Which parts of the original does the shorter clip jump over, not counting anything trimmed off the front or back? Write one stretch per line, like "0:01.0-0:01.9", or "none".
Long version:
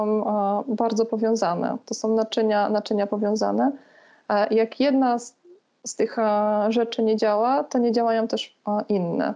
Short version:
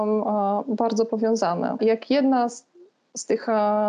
0:01.8-0:04.5